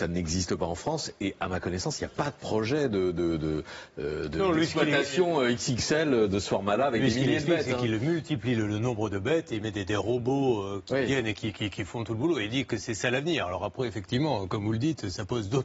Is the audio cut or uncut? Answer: uncut